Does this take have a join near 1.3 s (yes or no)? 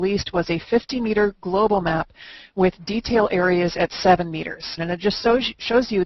no